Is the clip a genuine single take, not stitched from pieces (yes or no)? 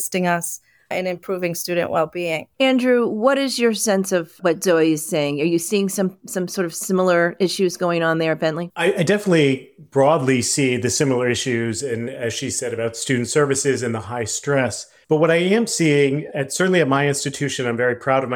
yes